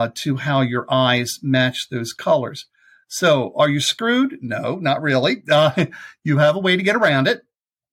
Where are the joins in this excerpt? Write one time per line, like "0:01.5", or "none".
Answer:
none